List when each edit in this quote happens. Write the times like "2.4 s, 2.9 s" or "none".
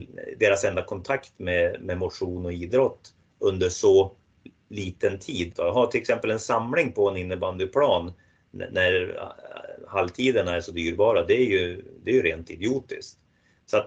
5.5 s